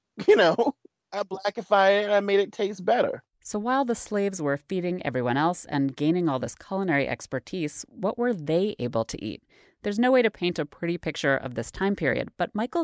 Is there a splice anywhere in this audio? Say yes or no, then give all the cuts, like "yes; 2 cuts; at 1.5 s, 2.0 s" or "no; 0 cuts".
no; 0 cuts